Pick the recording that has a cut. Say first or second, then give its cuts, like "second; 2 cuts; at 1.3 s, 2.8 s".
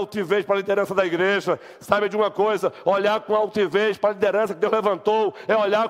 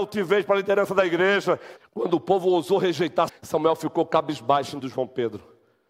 second; 3 cuts; at 1.8 s, 3.3 s, 4.8 s